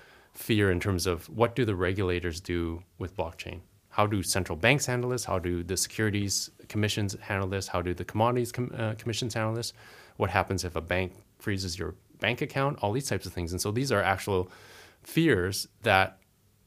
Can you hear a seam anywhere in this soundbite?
no; 0 cuts

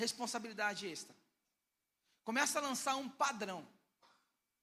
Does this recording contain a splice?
no; 0 cuts

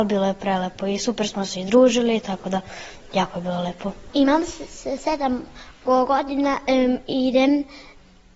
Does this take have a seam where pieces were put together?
no; 0 cuts

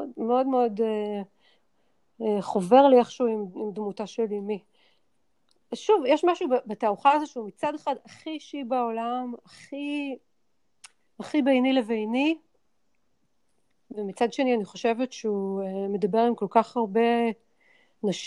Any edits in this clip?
no; 0 cuts

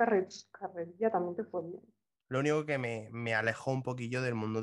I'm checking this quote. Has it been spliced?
yes; 1 cut; at 2.2 s

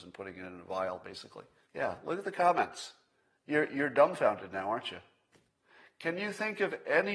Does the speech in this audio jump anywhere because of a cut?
yes; 1 cut; at 1.6 s

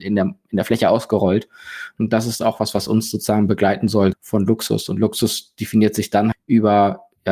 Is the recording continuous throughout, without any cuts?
no; 3 cuts; at 2.0 s, 4.1 s, 6.3 s

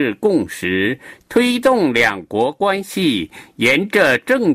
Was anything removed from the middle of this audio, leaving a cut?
yes; 1 cut; at 1.2 s

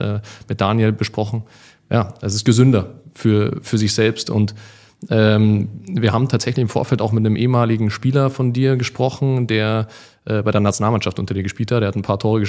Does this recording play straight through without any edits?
yes; 0 cuts

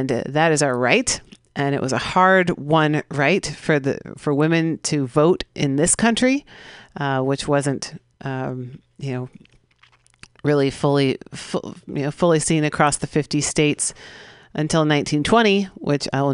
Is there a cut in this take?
no; 0 cuts

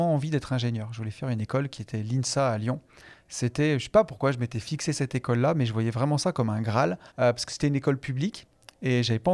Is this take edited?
yes; 1 cut; at 7.1 s

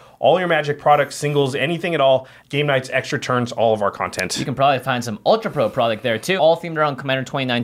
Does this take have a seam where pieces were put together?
yes; 2 cuts; at 2.4 s, 6.4 s

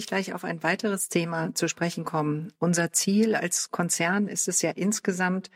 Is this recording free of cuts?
yes; 0 cuts

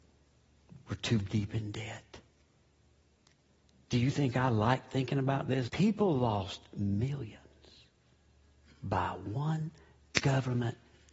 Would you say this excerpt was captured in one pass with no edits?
no; 1 cut; at 5.7 s

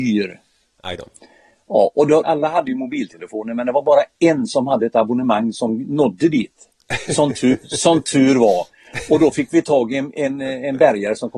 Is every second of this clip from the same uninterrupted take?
no; 1 cut; at 2.2 s

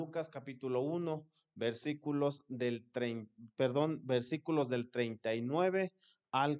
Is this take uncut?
yes; 0 cuts

